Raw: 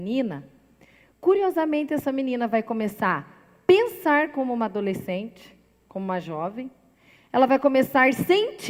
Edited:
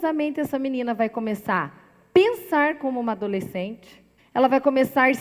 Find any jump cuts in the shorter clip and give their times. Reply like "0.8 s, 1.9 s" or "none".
4.2 s